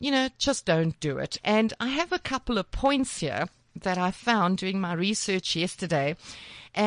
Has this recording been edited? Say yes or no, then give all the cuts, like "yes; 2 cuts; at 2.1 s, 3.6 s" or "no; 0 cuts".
yes; 1 cut; at 1.4 s